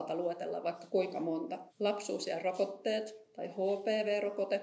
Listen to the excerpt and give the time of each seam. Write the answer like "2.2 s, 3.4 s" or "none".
1.7 s

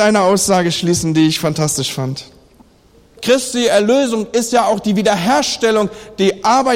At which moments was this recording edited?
3.2 s

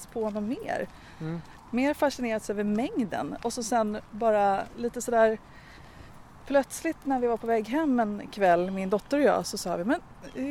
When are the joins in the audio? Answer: none

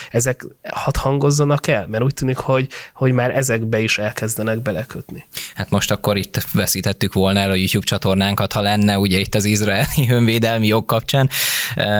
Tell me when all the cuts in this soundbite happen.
none

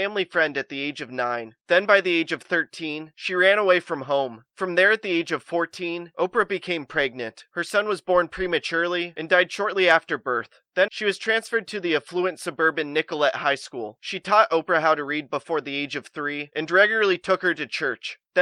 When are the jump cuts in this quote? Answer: 10.9 s, 14.0 s

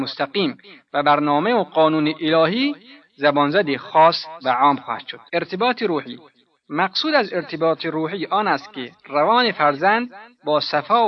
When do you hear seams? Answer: 5.3 s

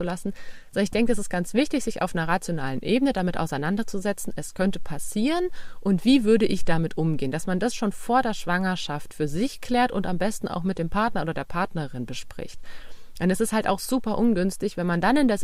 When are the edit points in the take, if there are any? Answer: none

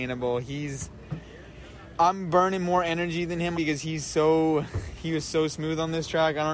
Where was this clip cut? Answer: 3.5 s

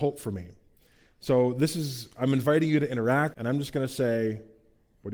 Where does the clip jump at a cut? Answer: 3.3 s

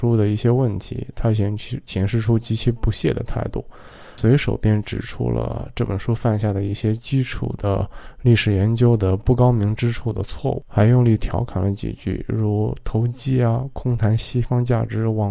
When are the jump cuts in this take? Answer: none

